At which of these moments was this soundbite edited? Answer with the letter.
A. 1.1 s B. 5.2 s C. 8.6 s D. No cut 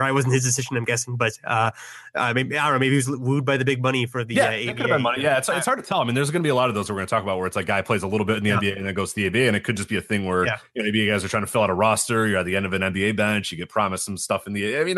D